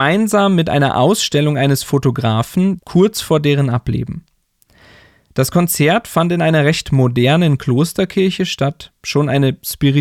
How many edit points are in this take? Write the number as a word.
one